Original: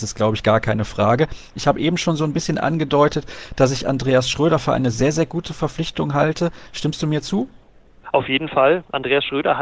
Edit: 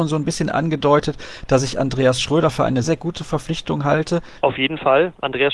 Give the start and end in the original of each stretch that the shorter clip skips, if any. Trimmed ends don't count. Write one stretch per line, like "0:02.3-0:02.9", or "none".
0:04.9-0:05.1
0:06.7-0:08.1